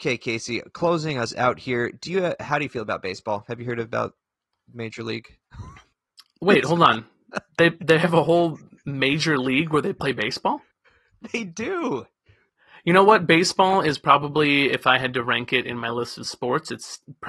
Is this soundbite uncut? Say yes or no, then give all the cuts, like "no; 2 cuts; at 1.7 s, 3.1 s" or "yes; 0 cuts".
yes; 0 cuts